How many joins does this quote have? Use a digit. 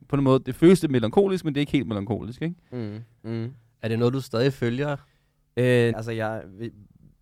2